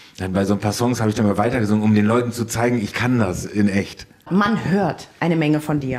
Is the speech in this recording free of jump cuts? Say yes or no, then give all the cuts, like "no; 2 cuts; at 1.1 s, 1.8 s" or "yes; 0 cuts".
yes; 0 cuts